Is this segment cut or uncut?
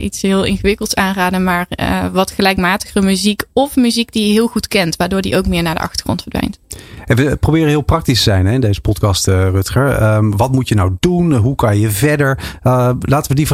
uncut